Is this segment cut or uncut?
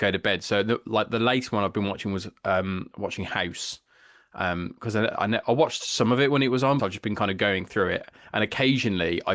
cut